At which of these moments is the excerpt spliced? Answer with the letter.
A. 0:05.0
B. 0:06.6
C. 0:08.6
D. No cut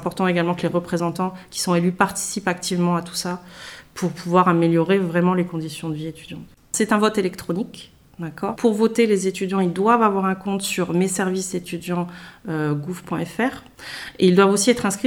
C